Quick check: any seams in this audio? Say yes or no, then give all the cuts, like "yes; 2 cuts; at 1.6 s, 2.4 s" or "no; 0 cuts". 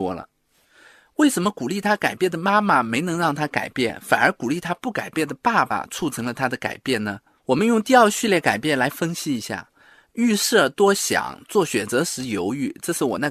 no; 0 cuts